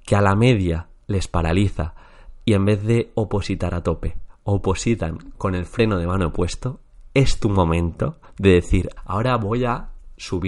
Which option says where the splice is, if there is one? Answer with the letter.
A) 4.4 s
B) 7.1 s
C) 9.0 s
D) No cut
C